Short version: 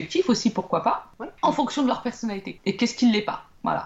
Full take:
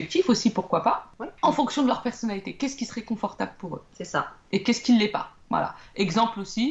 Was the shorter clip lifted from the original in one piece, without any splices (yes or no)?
no